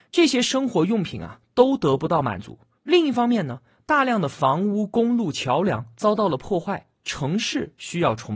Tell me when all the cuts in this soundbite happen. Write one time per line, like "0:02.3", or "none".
none